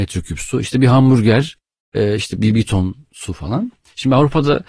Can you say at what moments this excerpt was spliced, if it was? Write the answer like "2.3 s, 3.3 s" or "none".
2.4 s

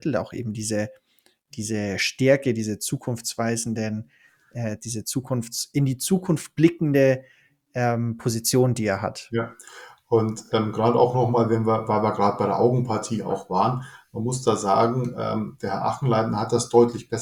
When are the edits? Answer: none

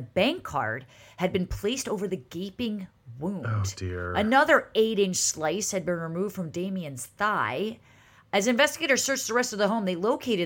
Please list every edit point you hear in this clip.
none

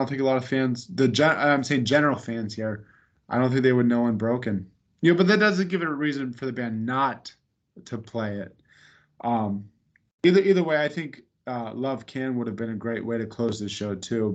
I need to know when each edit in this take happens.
none

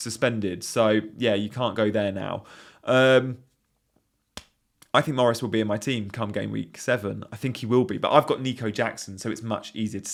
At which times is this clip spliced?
none

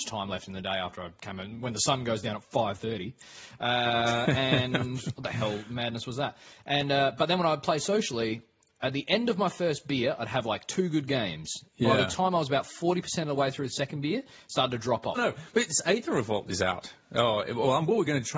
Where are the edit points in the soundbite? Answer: 15.2 s

